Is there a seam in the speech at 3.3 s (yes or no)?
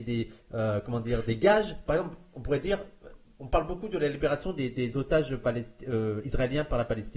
no